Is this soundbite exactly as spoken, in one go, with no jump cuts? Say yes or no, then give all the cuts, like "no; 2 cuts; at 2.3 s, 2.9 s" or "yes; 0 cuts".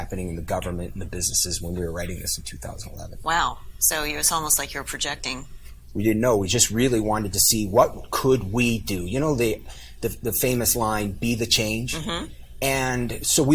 yes; 0 cuts